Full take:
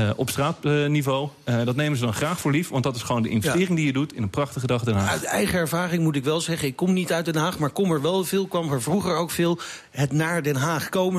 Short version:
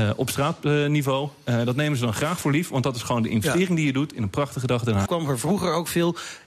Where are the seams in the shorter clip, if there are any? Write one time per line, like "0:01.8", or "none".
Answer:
0:05.1